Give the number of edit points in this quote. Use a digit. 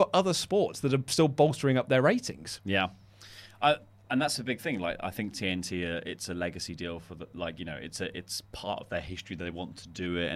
0